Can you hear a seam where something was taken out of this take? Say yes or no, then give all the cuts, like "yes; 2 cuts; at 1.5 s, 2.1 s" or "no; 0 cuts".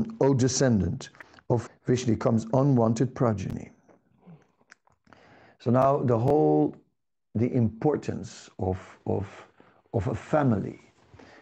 yes; 1 cut; at 1.7 s